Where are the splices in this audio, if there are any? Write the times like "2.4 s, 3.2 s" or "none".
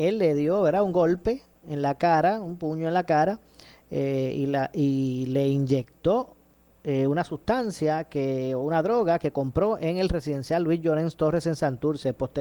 none